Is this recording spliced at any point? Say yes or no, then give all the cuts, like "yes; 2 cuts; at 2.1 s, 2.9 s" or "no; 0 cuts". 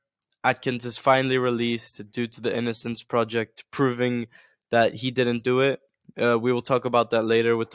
no; 0 cuts